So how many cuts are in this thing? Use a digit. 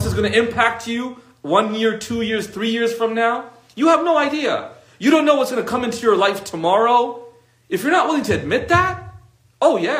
0